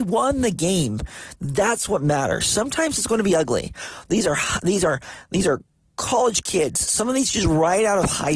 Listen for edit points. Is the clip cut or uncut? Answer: uncut